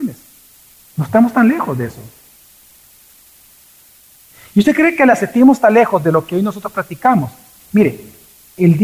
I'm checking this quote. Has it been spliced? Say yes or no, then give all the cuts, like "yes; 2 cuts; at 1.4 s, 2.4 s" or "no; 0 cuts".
no; 0 cuts